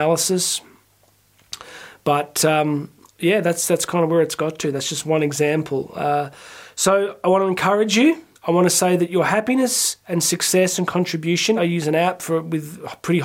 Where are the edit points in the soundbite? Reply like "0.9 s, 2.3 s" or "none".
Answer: 8.3 s, 11.6 s